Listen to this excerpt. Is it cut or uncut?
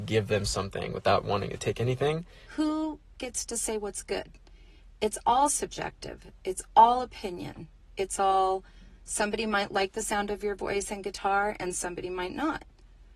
cut